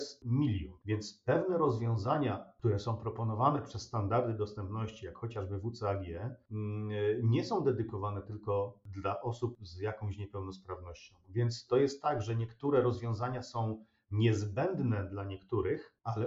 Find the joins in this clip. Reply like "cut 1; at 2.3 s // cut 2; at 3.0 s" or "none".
none

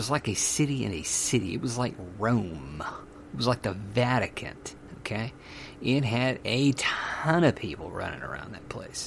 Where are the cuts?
none

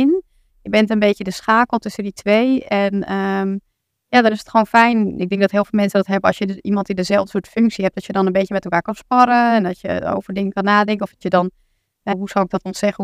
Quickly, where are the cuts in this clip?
cut 1; at 12.1 s

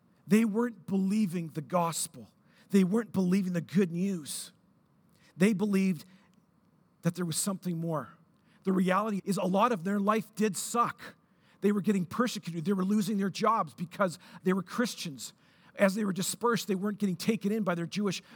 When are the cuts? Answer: cut 1; at 9.2 s

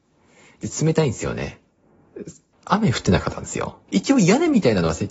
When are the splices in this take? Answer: cut 1; at 2.5 s // cut 2; at 3.9 s

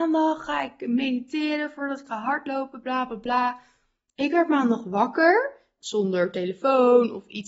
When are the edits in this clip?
cut 1; at 5.8 s

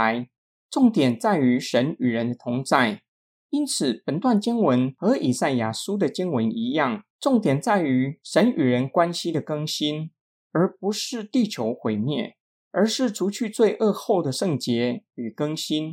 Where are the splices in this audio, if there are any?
none

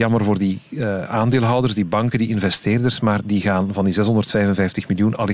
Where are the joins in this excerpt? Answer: none

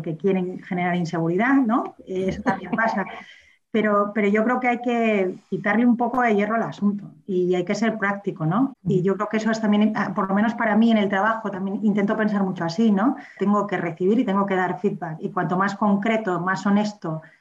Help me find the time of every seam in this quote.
cut 1; at 8.7 s // cut 2; at 13.4 s

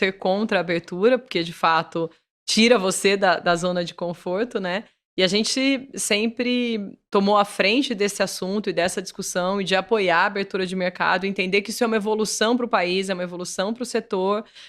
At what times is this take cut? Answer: none

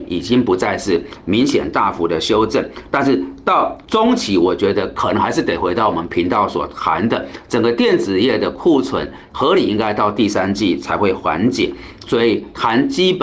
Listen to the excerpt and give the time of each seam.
cut 1; at 2.9 s

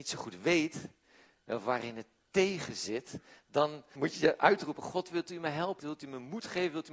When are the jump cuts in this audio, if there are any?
cut 1; at 4.0 s // cut 2; at 5.8 s

